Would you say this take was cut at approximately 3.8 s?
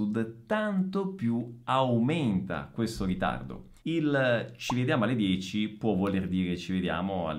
yes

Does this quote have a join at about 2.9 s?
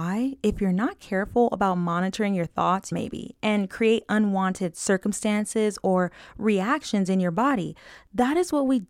yes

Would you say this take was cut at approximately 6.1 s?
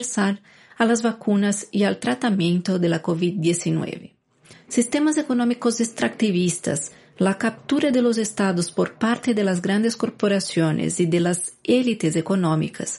no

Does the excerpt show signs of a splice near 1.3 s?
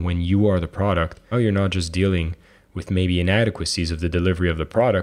yes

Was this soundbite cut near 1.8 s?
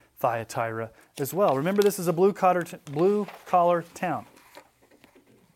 no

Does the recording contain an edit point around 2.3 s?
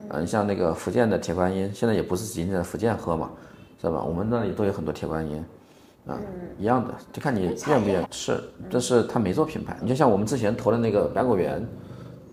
no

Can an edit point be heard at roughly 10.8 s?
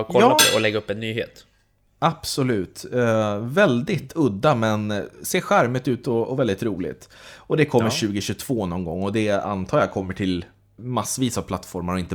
yes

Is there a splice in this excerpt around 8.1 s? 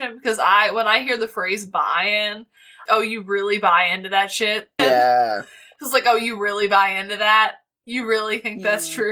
no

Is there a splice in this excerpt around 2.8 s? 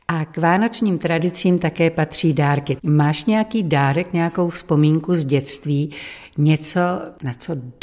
yes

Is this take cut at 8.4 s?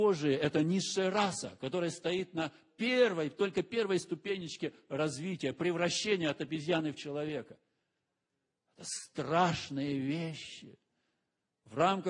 no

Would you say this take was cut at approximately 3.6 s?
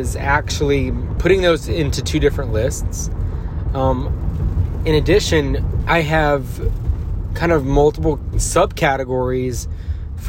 no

